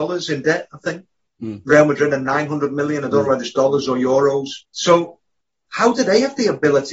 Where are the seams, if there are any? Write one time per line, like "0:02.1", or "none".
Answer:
0:04.6